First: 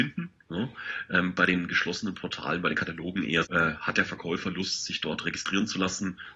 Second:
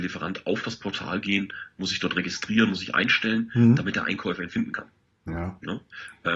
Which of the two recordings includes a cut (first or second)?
first